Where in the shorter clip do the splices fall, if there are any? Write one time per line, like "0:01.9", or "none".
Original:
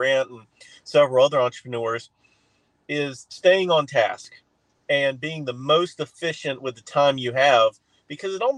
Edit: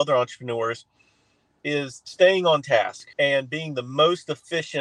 0:03.1